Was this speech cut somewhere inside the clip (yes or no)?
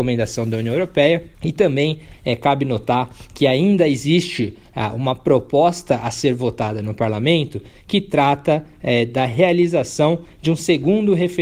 yes